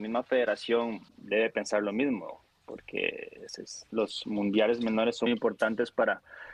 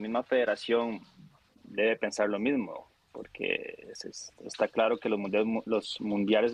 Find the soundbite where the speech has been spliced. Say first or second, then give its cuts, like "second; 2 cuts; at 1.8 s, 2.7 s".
first; 3 cuts; at 1.1 s, 3.9 s, 5.3 s